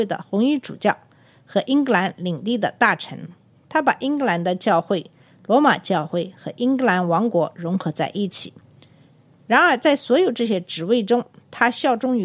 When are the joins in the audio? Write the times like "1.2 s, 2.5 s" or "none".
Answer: 3.5 s